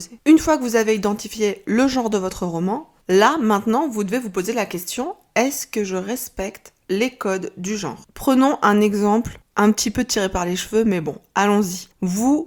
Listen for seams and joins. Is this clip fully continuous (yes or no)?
no